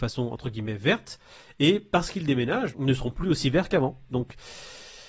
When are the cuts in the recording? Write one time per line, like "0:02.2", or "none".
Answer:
0:02.7
0:04.1